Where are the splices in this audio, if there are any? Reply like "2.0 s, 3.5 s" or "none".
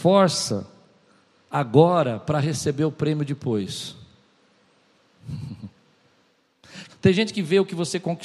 6.9 s